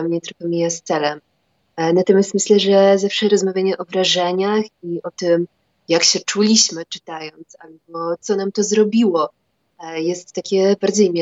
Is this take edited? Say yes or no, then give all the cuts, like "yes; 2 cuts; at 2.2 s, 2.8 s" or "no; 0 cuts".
no; 0 cuts